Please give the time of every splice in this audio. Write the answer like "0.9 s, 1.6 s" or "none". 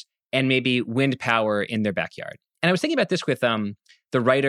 2.5 s

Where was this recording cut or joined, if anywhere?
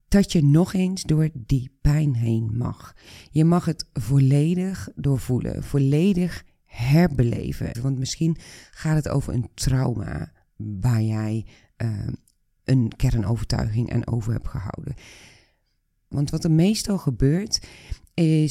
7.7 s, 16.1 s

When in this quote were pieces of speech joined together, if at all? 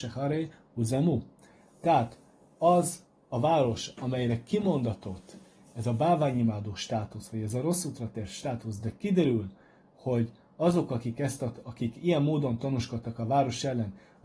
none

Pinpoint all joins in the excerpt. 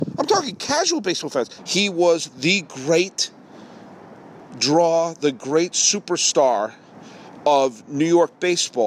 1.6 s

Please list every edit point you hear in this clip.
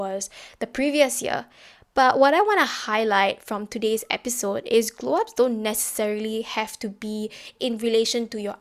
none

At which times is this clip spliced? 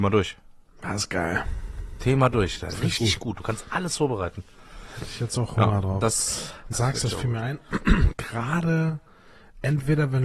6.7 s, 8.1 s

